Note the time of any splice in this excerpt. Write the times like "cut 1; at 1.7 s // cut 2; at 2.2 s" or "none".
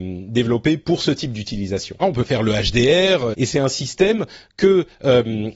cut 1; at 2.0 s // cut 2; at 3.3 s